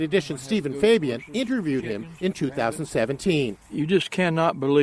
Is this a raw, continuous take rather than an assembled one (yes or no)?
yes